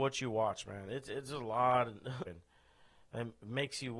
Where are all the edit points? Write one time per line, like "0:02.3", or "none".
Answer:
0:02.3